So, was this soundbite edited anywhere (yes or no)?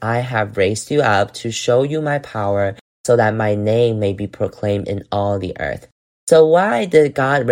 no